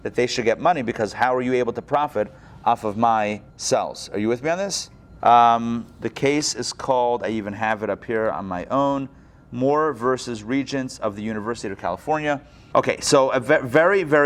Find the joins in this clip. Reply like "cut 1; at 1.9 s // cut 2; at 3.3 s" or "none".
cut 1; at 3.5 s // cut 2; at 5.2 s // cut 3; at 12.7 s